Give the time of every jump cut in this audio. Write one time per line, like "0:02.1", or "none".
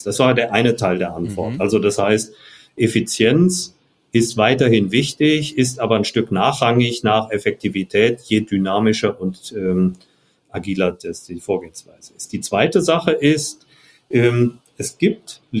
none